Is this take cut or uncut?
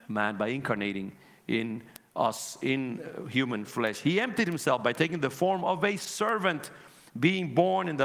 uncut